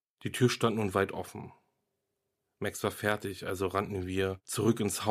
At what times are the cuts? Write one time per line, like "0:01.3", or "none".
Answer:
none